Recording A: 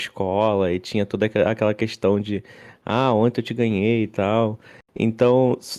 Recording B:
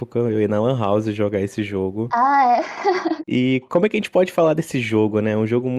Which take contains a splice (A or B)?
B